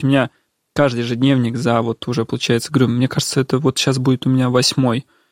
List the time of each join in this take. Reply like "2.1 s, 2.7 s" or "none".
none